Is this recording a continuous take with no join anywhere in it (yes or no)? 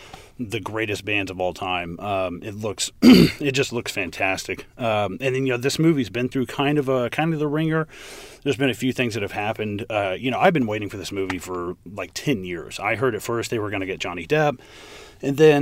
yes